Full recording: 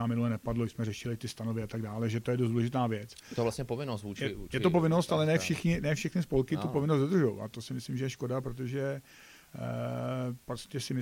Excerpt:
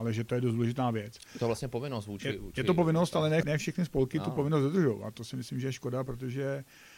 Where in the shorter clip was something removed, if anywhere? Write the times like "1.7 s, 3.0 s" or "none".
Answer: 3.4 s